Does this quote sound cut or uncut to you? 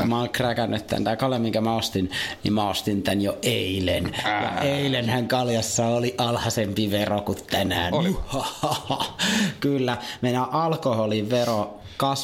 uncut